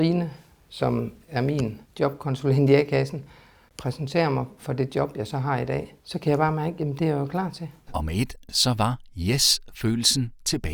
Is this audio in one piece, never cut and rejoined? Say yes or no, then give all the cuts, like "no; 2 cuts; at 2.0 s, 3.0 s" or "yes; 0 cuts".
no; 2 cuts; at 6.0 s, 7.9 s